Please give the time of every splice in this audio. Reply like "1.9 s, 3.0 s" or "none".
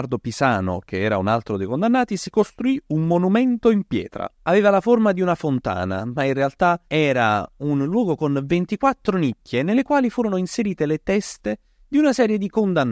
4.3 s, 6.9 s